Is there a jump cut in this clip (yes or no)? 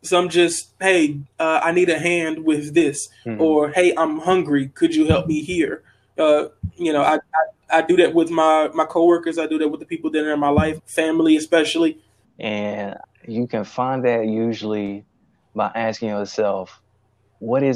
yes